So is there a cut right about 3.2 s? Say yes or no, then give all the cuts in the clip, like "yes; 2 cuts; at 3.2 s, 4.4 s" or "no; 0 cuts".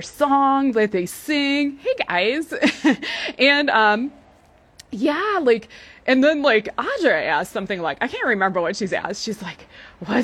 no; 0 cuts